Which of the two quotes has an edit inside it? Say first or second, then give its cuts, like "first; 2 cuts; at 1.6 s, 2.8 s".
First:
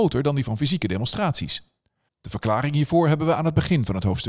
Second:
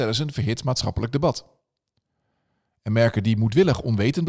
first; 1 cut; at 2.1 s